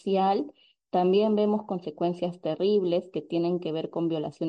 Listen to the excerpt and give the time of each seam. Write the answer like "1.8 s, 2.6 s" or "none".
none